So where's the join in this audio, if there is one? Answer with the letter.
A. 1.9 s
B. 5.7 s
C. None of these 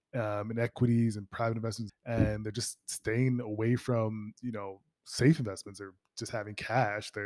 A